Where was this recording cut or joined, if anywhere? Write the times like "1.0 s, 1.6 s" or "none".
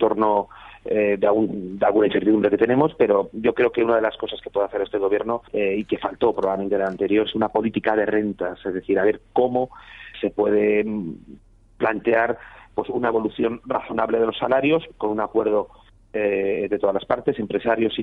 5.5 s, 10.1 s